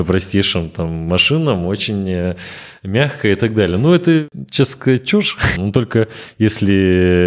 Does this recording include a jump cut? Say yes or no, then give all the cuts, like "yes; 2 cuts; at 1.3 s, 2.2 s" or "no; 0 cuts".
yes; 1 cut; at 5.6 s